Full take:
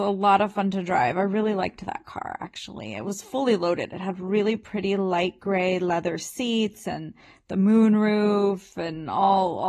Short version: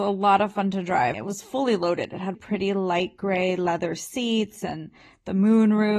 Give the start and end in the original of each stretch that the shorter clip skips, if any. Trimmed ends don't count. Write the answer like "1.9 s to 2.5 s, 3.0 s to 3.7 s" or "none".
1.1 s to 2.9 s, 4.1 s to 4.6 s